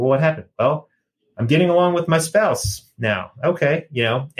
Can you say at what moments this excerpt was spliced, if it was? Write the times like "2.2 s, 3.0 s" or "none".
none